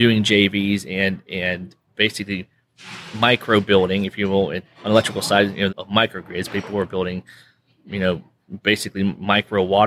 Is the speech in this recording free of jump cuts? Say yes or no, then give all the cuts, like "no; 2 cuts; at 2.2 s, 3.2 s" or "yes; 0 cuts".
no; 1 cut; at 5.7 s